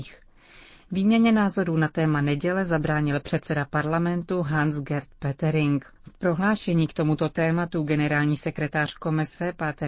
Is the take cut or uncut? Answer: cut